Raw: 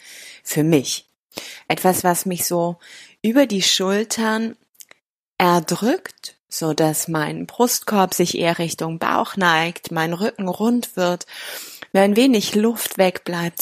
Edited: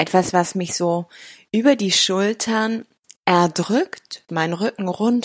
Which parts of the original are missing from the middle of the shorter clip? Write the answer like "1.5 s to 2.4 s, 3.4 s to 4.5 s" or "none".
4.9 s to 5.3 s, 6.4 s to 9.9 s

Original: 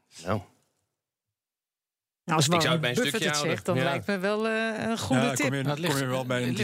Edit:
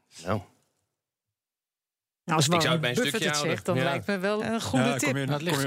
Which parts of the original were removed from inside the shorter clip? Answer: 4.4 s to 4.8 s

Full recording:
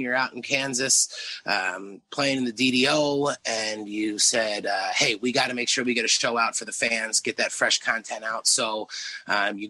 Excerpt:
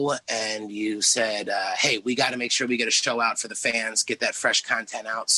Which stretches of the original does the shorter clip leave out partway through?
none

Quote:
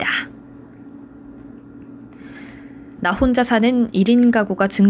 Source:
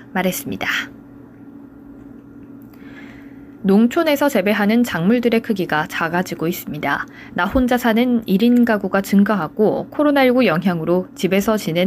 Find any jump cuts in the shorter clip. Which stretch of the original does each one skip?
3.6 s to 7.3 s

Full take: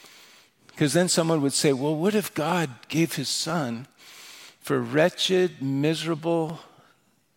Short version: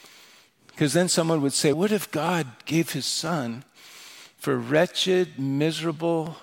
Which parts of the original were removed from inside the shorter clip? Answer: 1.7 s to 2.0 s

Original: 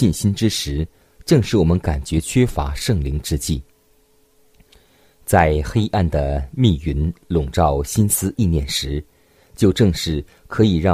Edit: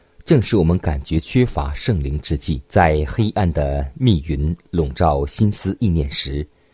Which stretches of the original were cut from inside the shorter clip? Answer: 3.7 s to 5.2 s

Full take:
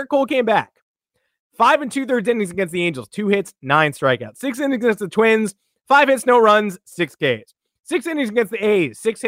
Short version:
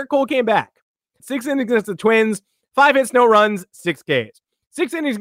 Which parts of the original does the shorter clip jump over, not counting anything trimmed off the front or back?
1.2 s to 4.3 s

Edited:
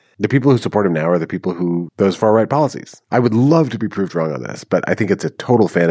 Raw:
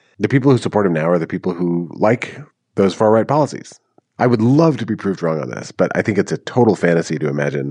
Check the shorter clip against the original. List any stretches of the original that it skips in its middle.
1.9 s to 2.7 s, 3.8 s to 4.1 s

